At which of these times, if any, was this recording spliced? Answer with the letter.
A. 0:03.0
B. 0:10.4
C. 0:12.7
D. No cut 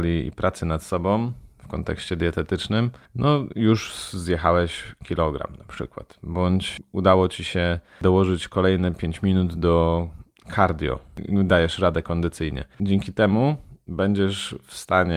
C